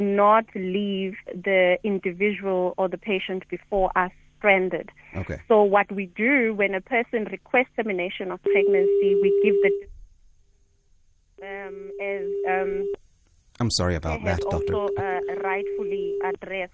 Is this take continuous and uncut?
yes; 0 cuts

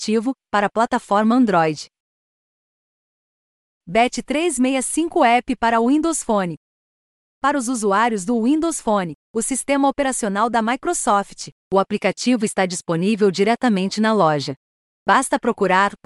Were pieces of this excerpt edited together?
no; 0 cuts

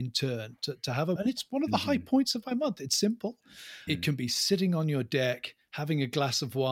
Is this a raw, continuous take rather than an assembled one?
no; 2 cuts; at 1.2 s, 3.9 s

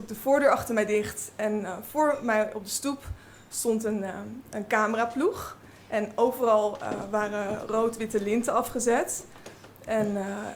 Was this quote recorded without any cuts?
yes; 0 cuts

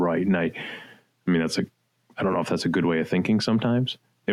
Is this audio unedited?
yes; 0 cuts

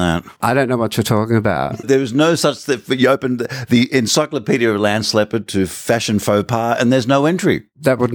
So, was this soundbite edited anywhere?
no; 0 cuts

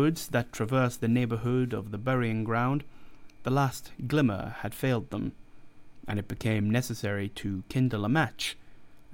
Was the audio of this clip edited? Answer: no; 0 cuts

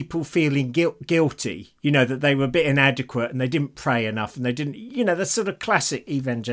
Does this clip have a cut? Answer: no; 0 cuts

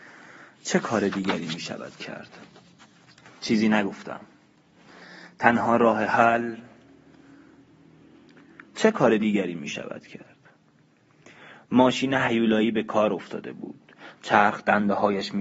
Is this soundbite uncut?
yes; 0 cuts

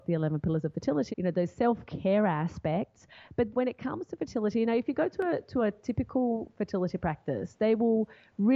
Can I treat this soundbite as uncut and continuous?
no; 2 cuts; at 1.1 s, 3.5 s

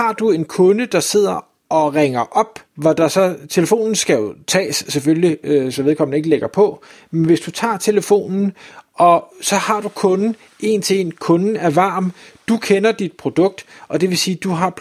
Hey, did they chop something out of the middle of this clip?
yes; 1 cut; at 2.7 s

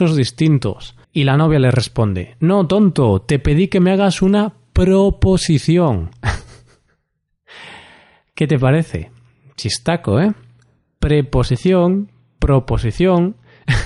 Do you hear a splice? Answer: yes; 1 cut; at 1.0 s

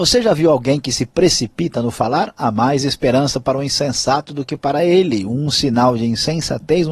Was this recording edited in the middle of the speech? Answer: no; 0 cuts

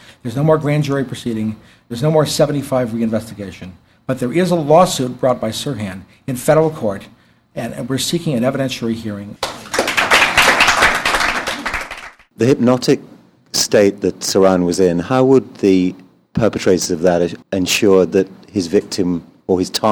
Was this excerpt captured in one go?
no; 2 cuts; at 9.4 s, 17.4 s

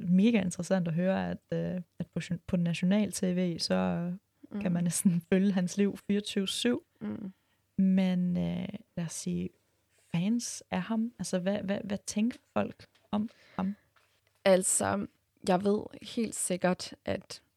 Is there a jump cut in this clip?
yes; 1 cut; at 8.9 s

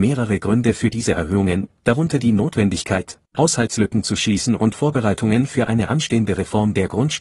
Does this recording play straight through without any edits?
yes; 0 cuts

